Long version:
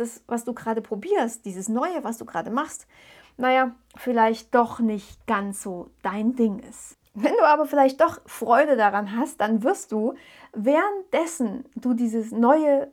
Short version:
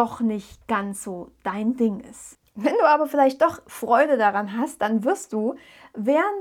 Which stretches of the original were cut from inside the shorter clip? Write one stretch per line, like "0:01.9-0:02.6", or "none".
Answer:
none